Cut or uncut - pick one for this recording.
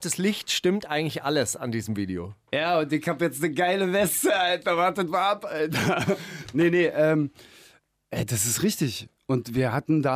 uncut